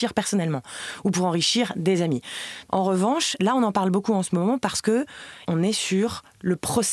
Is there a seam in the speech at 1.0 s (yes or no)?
no